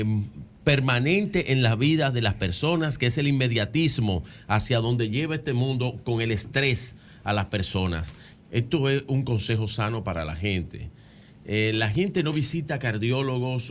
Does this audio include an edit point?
yes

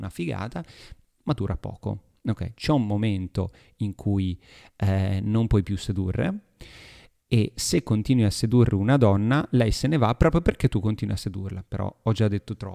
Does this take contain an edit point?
no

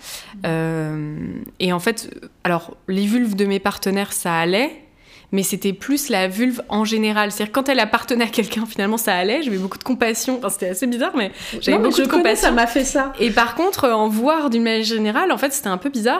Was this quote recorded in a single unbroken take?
yes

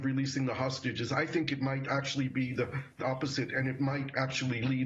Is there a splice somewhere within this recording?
yes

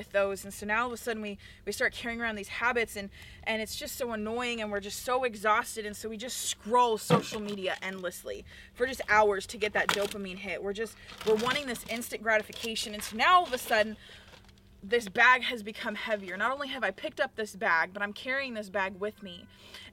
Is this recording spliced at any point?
no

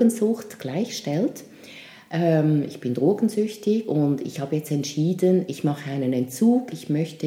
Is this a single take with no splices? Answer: yes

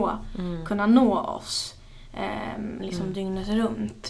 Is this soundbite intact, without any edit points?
no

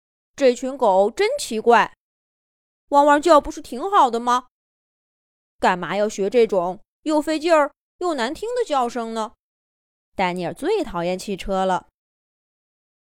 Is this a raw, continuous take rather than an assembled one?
no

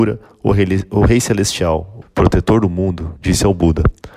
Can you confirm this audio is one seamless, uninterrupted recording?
no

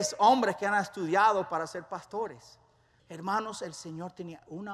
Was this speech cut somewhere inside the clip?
yes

